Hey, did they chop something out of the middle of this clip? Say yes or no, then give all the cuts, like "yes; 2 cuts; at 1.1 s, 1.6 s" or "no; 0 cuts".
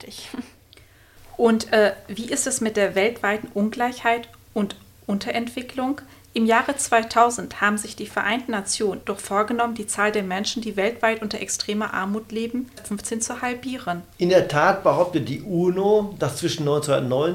yes; 3 cuts; at 9.0 s, 12.8 s, 14.1 s